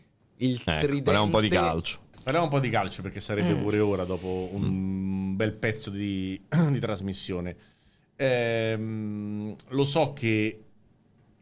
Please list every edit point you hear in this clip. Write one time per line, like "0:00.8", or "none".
0:02.1